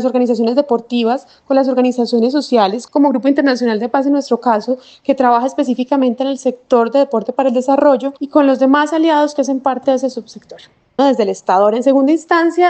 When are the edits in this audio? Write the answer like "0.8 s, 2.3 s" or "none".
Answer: 2.9 s, 8.2 s, 11.0 s